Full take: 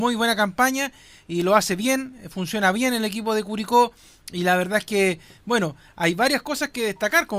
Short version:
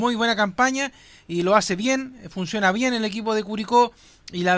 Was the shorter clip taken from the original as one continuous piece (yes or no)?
yes